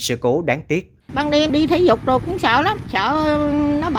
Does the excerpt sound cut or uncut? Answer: uncut